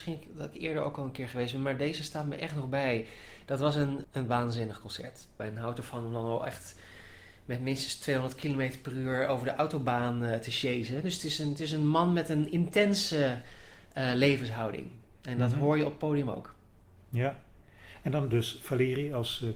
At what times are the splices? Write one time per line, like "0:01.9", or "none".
0:04.0
0:05.4

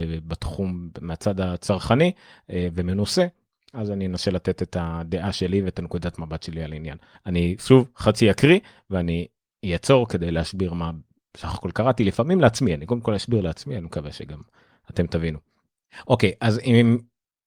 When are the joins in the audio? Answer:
0:07.1

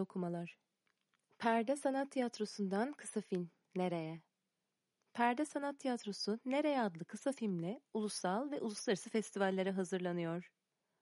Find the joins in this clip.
none

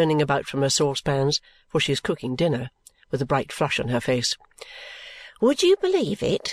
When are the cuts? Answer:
none

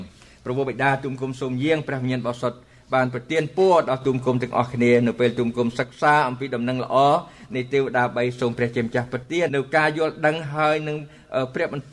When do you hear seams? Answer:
0:09.5

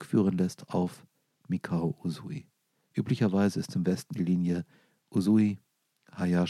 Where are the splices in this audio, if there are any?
none

